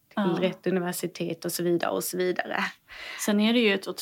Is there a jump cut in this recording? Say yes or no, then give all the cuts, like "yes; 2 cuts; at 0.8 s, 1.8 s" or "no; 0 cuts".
no; 0 cuts